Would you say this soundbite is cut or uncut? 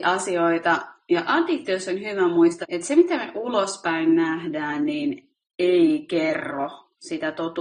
cut